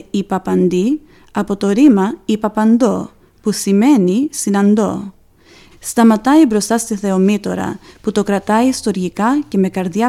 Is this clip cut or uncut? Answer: cut